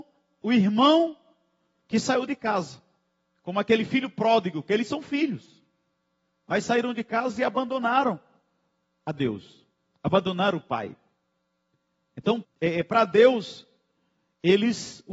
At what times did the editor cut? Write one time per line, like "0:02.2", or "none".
0:12.4